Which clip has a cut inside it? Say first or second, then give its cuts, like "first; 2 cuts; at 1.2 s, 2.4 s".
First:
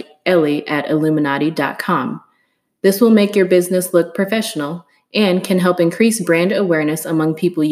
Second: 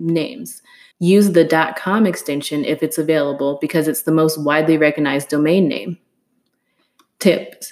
second; 1 cut; at 0.9 s